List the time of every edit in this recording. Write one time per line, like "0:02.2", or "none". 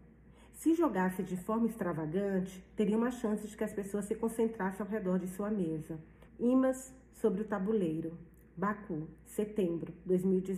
0:06.3